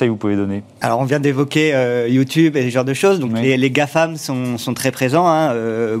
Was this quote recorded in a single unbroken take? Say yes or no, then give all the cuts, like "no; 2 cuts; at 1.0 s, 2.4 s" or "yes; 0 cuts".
yes; 0 cuts